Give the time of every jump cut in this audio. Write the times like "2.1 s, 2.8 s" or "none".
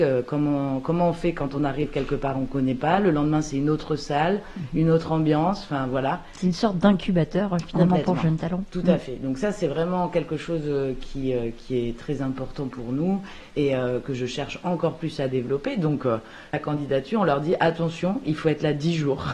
16.5 s